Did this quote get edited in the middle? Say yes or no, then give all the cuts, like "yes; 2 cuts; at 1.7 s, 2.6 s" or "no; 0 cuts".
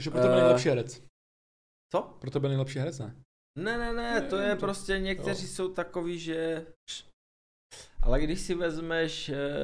no; 0 cuts